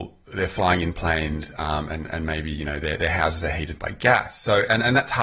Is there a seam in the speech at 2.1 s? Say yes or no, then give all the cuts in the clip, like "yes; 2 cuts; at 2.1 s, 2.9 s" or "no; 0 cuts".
no; 0 cuts